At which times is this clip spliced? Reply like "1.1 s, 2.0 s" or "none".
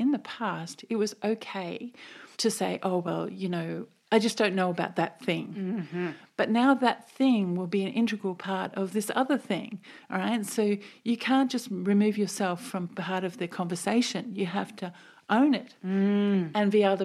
2.3 s